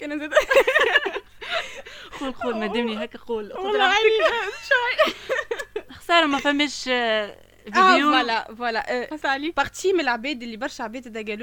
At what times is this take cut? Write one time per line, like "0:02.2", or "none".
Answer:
none